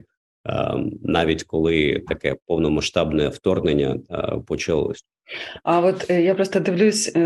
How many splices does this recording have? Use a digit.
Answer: 0